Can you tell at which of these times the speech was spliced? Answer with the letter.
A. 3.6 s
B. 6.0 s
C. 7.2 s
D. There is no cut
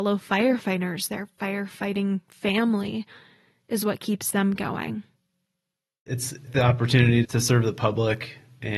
C